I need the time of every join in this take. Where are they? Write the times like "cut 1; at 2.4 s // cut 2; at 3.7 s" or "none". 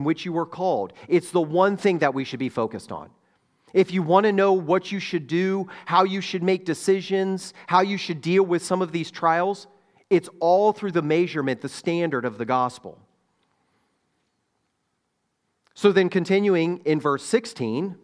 none